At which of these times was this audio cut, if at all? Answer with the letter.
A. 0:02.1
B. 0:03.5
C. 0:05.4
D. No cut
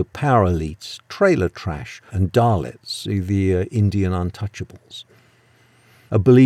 A